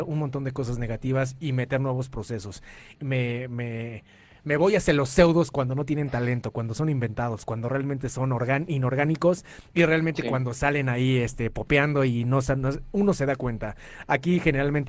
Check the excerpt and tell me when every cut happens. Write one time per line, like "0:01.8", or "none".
0:03.0